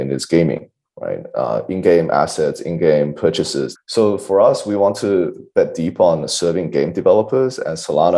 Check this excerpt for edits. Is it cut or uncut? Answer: cut